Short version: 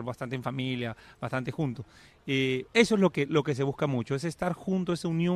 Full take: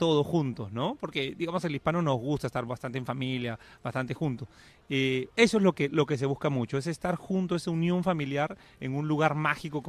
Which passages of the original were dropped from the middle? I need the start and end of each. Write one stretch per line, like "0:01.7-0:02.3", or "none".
none